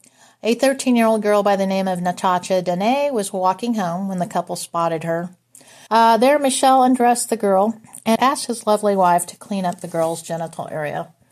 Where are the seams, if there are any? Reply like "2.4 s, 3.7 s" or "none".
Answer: 5.9 s, 8.2 s